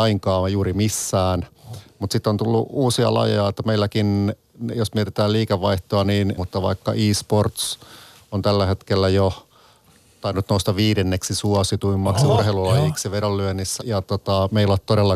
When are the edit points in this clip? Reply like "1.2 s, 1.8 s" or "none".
6.4 s, 13.8 s